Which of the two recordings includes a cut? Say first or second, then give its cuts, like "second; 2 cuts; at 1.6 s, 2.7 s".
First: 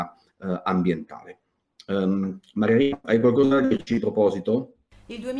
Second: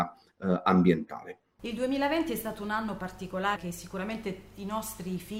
second; 2 cuts; at 1.6 s, 3.6 s